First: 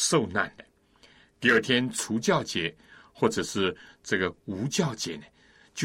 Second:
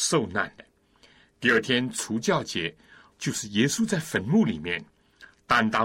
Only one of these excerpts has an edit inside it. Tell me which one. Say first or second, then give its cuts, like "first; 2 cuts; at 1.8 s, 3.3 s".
second; 1 cut; at 3.1 s